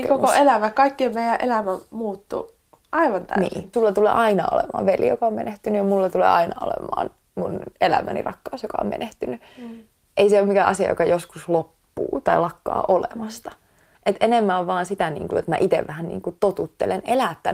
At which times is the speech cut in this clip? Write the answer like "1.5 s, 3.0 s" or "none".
3.7 s, 13.9 s, 15.3 s